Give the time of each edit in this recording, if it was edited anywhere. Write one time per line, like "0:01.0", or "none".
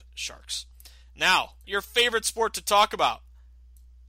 0:01.6